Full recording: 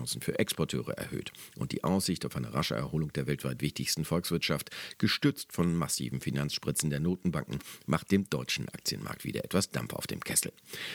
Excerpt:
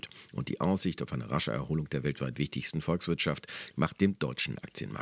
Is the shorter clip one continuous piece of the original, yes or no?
no